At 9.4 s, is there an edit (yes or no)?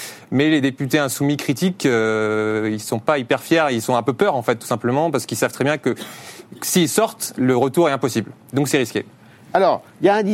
no